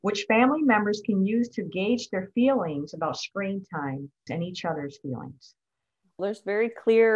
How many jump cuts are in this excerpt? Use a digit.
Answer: 2